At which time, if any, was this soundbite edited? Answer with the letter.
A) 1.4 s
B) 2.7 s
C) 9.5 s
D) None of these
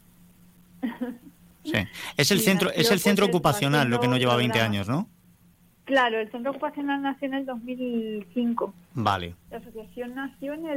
C